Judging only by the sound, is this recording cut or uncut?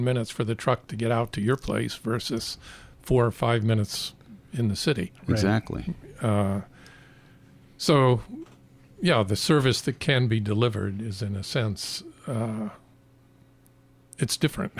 uncut